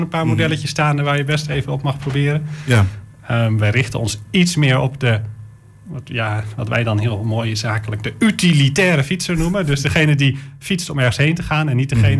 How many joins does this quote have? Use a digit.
0